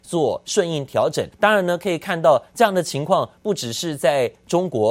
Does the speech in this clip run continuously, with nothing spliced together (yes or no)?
no